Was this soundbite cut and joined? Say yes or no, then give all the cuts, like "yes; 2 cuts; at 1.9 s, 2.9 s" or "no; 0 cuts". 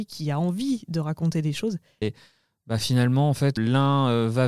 yes; 2 cuts; at 2.0 s, 3.6 s